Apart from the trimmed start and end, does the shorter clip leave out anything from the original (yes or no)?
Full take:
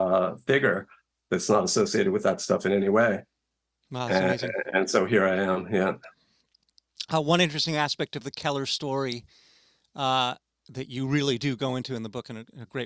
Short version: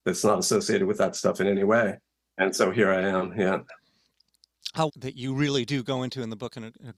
yes